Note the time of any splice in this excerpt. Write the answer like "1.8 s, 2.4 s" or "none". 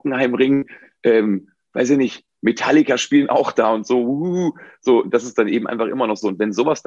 none